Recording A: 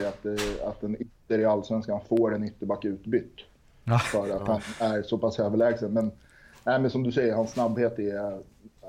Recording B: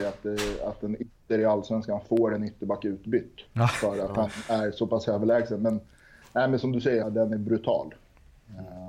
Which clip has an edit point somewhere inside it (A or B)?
B